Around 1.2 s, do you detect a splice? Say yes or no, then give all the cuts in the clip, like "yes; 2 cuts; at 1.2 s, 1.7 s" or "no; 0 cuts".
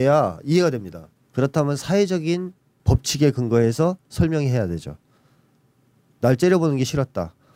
yes; 1 cut; at 1.2 s